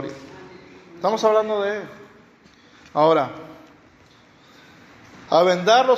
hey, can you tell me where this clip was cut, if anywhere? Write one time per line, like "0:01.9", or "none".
none